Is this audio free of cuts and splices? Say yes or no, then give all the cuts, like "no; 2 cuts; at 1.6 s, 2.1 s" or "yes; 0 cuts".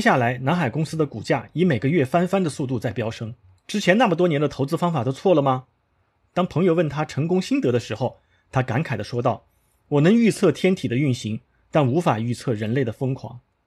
no; 1 cut; at 3.6 s